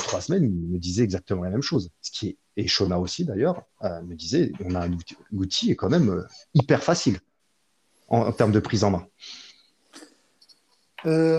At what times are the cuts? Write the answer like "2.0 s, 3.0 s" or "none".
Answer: none

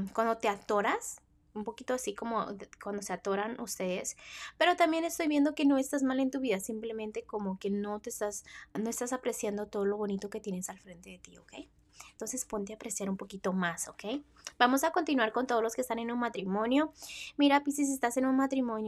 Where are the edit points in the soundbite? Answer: 8.8 s

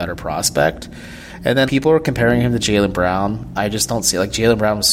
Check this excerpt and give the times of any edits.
1.7 s

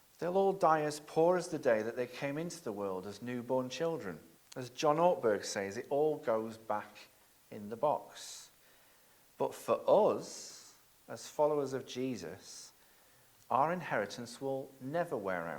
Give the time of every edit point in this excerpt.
4.3 s

